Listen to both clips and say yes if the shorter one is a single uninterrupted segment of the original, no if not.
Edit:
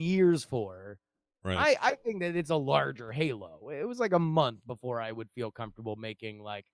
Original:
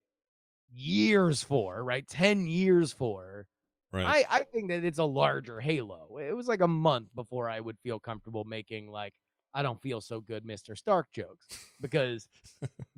yes